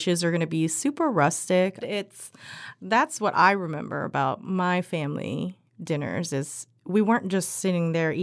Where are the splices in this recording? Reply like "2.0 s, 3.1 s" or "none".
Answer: 1.8 s

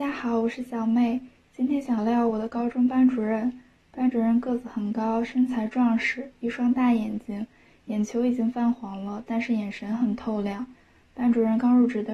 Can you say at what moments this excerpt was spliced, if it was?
2.0 s

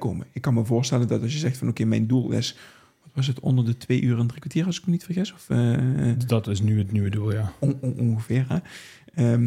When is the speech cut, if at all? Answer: none

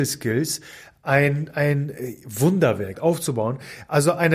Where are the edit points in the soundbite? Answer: 2.9 s

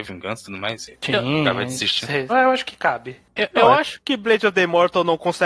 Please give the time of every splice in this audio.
2.3 s

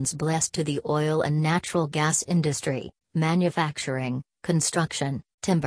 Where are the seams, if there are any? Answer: 3.0 s

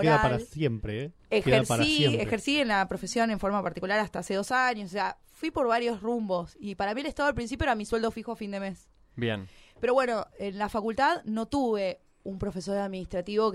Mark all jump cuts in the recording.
none

